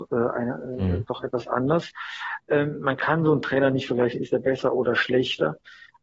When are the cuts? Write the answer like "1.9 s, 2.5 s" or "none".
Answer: none

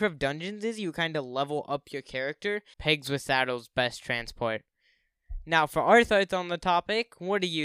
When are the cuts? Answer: 2.7 s

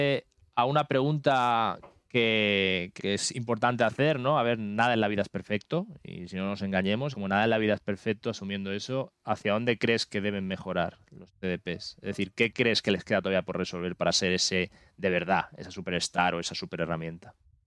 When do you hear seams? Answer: 3.0 s, 7.1 s

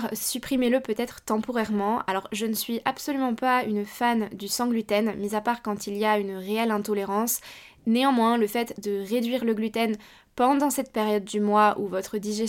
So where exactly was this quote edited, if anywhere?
none

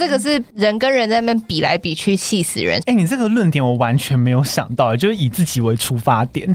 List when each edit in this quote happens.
2.8 s

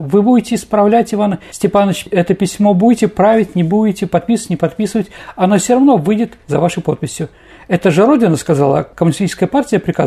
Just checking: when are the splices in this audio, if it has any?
none

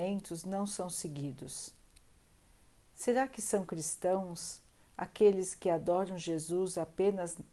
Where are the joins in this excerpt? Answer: none

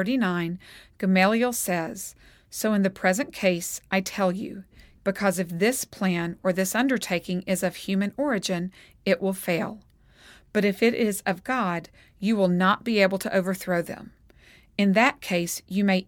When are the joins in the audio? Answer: 5.0 s

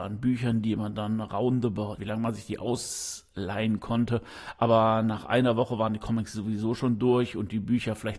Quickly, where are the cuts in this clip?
2.0 s

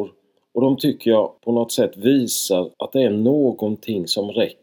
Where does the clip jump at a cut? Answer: 1.4 s, 2.7 s

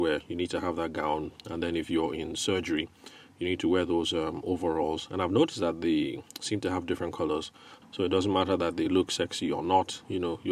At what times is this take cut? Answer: 7.8 s

